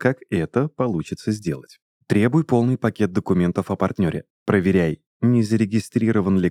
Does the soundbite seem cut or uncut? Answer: uncut